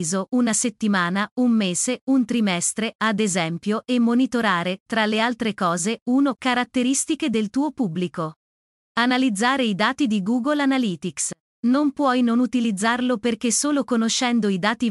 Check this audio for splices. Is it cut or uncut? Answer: cut